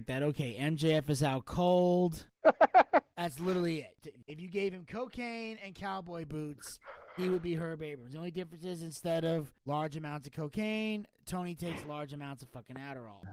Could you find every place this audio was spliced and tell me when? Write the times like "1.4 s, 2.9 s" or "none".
2.3 s